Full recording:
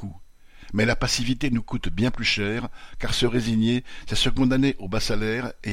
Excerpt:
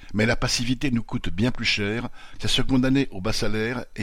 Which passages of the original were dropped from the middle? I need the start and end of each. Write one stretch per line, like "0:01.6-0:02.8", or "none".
0:03.0-0:04.0